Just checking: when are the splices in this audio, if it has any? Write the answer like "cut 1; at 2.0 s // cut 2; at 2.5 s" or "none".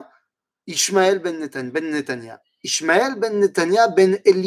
none